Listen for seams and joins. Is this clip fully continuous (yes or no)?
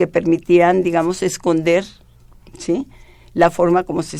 yes